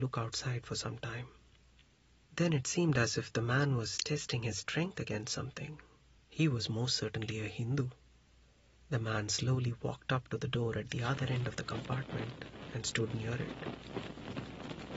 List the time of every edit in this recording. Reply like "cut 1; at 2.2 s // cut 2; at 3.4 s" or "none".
cut 1; at 6.2 s // cut 2; at 8.7 s